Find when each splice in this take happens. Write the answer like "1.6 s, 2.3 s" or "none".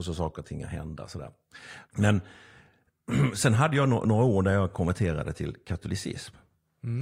1.8 s